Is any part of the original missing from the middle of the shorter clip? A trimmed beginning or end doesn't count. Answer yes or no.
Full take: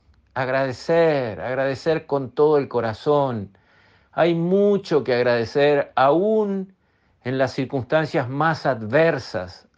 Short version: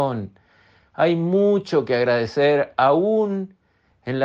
no